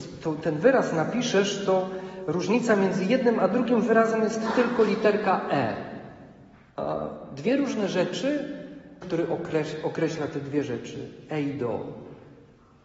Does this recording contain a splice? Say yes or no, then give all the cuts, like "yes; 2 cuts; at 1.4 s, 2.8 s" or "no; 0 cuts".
yes; 2 cuts; at 6.7 s, 9.0 s